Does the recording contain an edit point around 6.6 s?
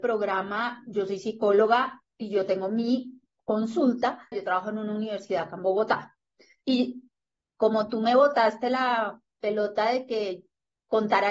yes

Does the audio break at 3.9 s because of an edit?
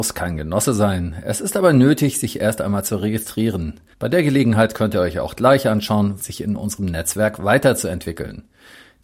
yes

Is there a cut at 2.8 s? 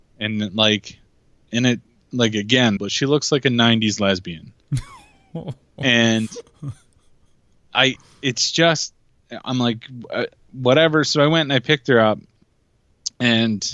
yes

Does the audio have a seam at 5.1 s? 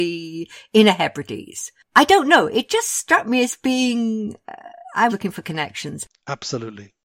yes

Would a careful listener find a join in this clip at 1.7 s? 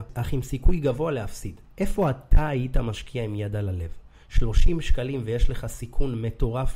yes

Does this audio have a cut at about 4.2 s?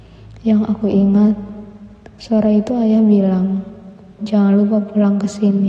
yes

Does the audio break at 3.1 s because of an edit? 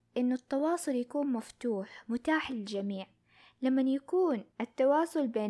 no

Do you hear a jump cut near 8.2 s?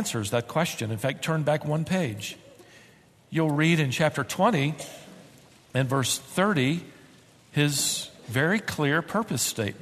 no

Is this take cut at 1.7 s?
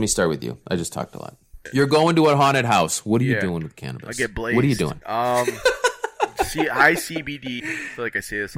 no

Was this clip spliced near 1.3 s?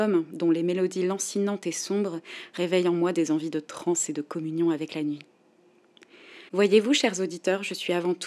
no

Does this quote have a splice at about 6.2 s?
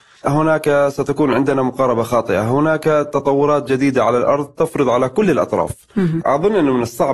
yes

